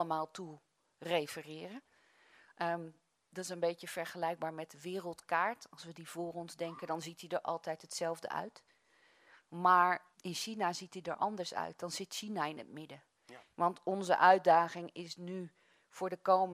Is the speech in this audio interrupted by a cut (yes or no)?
yes